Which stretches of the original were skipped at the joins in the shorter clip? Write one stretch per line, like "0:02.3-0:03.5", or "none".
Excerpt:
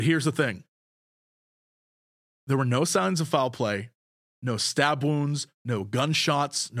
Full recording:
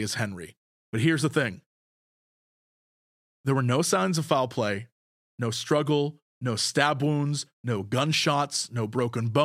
0:05.3-0:06.3

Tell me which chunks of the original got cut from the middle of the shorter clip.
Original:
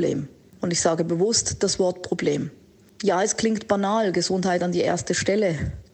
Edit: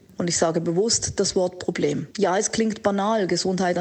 0:02.5-0:03.0

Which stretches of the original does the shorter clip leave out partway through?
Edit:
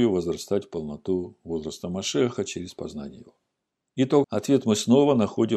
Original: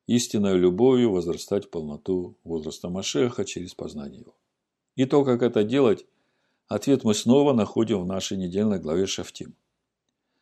0:05.2-0:06.6

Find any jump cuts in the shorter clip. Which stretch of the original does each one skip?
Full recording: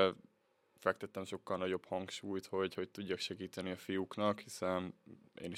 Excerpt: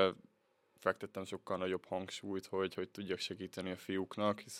none

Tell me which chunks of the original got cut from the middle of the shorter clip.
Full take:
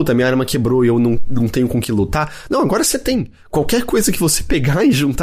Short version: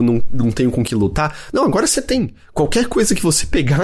none

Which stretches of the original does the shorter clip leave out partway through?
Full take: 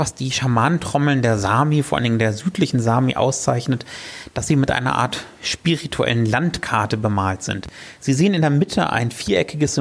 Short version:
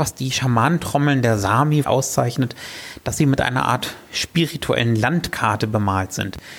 0:01.8-0:03.1

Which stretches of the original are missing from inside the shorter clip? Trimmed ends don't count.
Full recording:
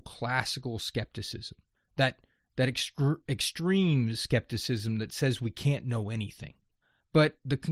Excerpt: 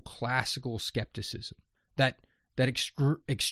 none

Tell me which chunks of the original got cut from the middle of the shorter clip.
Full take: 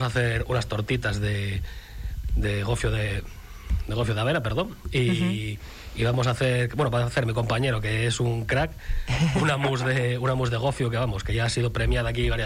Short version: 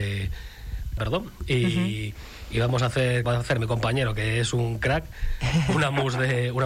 0:02.3-0:04.4
0:06.7-0:06.9

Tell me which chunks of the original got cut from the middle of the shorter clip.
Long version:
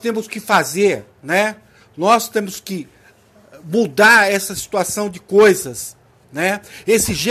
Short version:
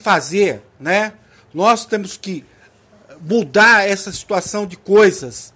none

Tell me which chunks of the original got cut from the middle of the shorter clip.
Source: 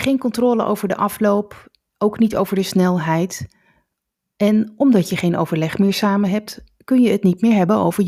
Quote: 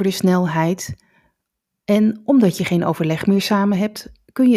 none

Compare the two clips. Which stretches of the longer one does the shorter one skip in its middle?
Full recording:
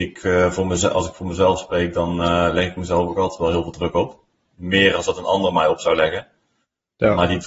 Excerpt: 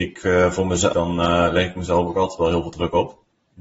0:00.9-0:01.9

